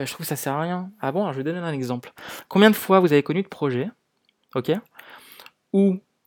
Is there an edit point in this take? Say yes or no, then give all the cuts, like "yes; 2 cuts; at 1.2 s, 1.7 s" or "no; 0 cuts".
no; 0 cuts